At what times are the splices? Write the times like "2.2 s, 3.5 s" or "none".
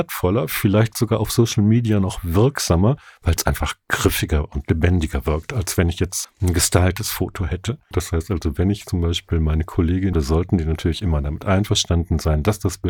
6.2 s, 7.9 s, 10.1 s